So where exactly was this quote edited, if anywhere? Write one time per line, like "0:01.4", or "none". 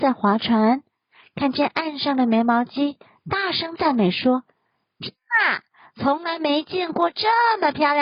none